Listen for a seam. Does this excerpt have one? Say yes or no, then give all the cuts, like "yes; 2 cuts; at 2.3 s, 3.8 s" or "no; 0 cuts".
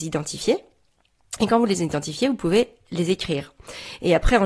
no; 0 cuts